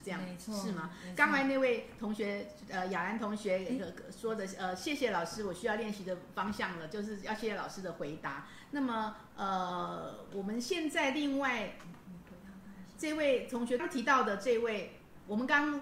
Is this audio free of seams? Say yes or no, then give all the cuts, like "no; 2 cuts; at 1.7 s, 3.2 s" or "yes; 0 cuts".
no; 1 cut; at 13.8 s